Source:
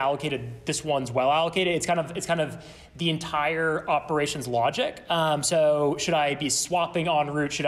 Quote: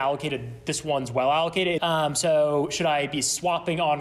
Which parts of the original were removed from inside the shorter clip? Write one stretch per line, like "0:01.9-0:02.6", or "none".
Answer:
0:01.8-0:05.1

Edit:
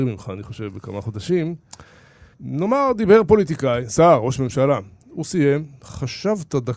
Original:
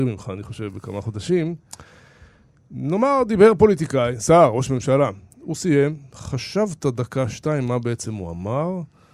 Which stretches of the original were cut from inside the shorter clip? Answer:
0:02.3-0:02.6

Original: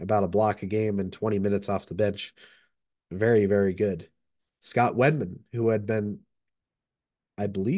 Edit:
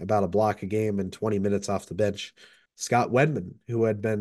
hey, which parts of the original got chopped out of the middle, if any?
0:02.7-0:04.5

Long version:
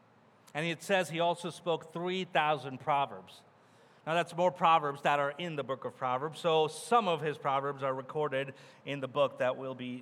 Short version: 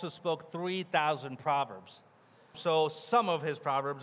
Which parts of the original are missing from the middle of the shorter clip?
0:04.0-0:06.3

